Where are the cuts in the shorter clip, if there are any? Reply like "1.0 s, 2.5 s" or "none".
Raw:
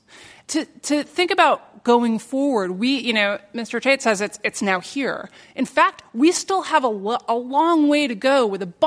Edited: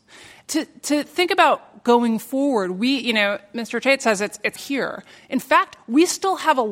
4.6 s

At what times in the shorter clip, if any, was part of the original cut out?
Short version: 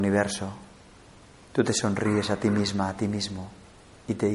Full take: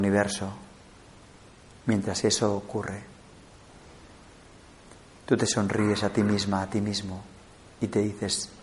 1.3 s

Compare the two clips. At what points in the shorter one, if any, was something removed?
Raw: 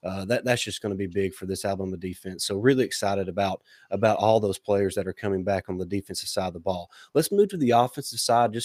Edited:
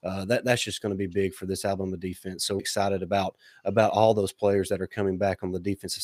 2.6 s

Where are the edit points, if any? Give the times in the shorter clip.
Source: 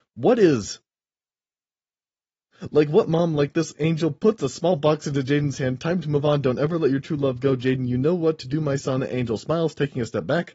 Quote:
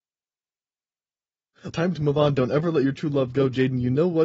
1.7 s

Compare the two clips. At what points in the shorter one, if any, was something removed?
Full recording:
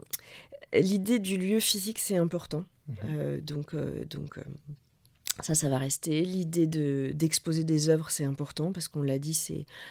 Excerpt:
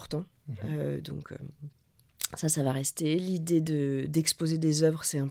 1.0 s

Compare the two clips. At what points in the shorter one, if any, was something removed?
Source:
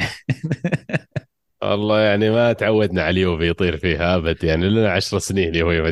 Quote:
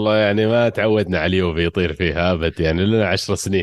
none

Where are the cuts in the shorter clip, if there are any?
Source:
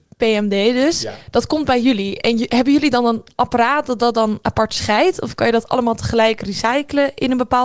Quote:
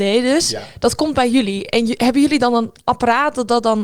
none

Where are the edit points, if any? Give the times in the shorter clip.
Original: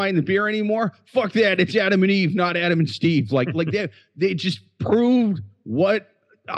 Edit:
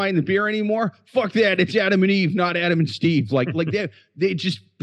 none

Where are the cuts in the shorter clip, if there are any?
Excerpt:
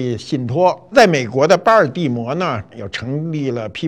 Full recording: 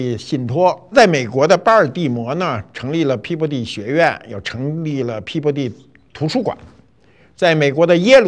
2.7 s

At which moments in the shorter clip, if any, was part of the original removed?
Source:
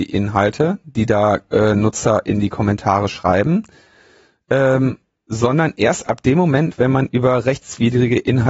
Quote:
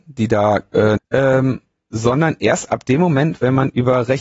1.0 s

